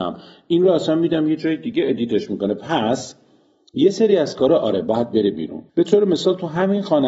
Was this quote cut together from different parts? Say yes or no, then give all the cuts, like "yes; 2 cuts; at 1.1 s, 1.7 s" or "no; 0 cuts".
yes; 1 cut; at 5.7 s